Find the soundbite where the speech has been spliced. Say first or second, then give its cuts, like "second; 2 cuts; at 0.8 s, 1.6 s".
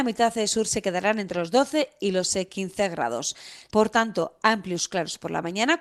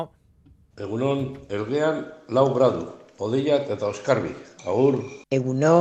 first; 1 cut; at 3.7 s